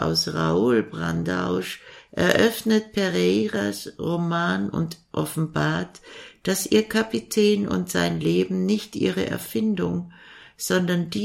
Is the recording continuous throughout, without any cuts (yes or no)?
no